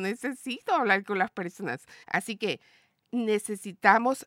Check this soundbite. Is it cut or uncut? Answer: cut